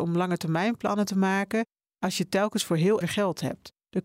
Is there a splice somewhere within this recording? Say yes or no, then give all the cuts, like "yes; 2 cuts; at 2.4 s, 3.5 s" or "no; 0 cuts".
yes; 1 cut; at 3.0 s